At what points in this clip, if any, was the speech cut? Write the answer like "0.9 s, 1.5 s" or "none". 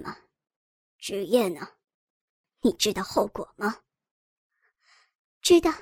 2.4 s